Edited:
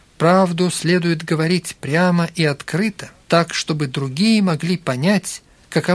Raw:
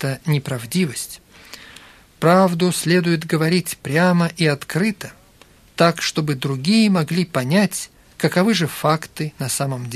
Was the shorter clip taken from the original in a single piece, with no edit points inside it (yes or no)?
no